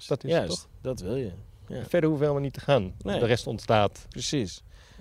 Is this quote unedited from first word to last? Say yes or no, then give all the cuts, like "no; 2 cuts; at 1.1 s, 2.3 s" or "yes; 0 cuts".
yes; 0 cuts